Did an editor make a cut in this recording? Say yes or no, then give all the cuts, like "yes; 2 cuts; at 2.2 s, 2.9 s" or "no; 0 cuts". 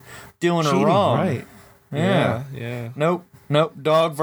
no; 0 cuts